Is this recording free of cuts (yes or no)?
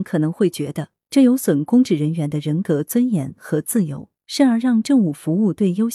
yes